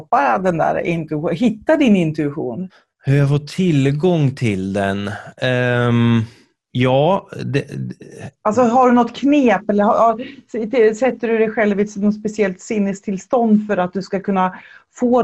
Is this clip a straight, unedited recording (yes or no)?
yes